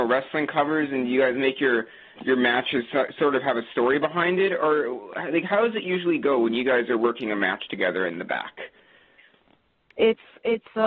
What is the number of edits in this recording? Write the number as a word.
zero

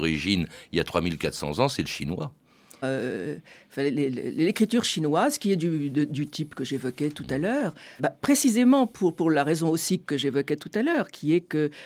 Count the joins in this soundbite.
two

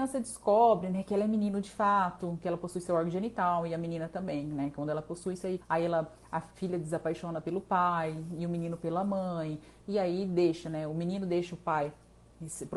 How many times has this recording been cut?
one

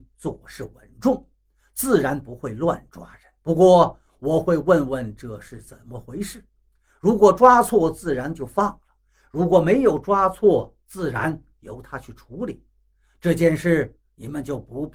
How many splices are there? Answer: one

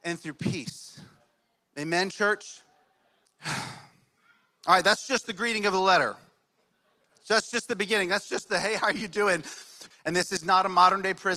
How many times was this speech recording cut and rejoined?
two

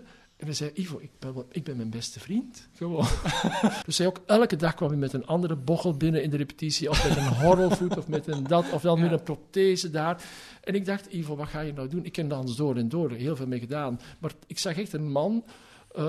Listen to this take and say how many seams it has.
one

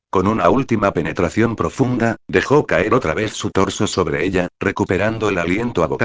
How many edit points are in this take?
zero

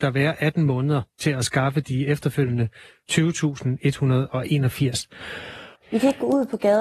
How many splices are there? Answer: one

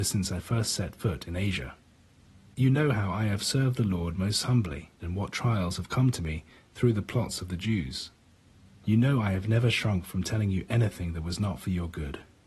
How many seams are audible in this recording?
one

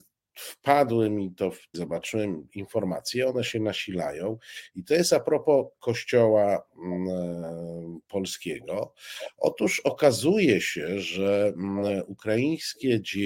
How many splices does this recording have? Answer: one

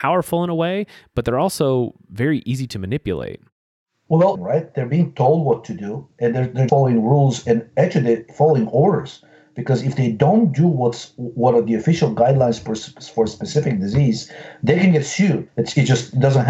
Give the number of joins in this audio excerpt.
three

